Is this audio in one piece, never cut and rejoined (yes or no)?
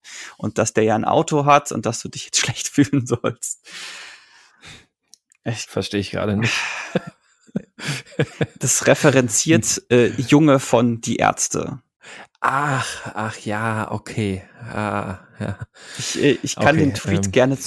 yes